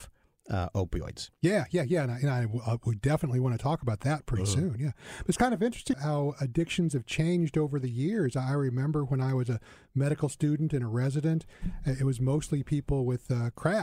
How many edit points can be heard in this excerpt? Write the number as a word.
one